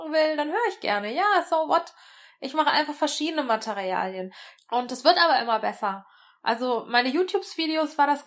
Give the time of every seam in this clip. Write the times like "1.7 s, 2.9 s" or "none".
4.6 s